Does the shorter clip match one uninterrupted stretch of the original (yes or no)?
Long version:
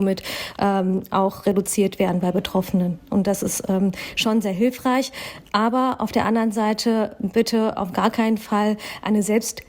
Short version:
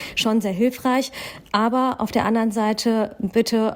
yes